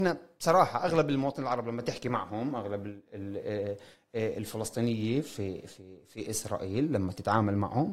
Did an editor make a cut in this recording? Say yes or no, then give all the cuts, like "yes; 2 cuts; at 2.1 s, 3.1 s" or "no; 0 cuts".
no; 0 cuts